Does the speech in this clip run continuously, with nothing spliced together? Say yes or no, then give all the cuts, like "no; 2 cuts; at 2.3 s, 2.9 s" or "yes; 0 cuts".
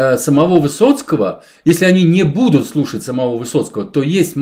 yes; 0 cuts